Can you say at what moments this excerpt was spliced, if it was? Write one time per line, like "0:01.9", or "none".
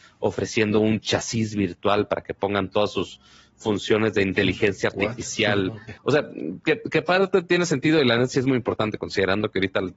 0:06.0